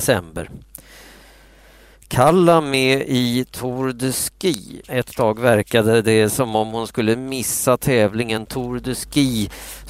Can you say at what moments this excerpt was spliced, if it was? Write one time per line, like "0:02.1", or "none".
0:04.8